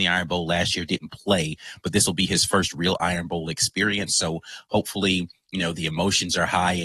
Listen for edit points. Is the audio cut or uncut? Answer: uncut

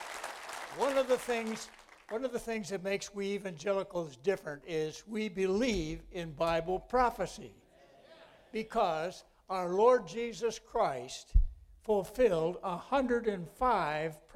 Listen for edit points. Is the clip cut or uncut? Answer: uncut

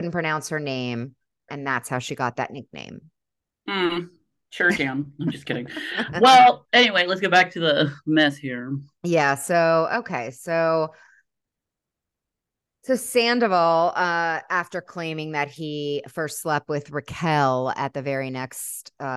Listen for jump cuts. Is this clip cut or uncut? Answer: cut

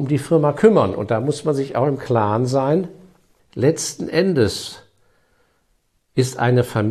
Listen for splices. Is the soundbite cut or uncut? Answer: cut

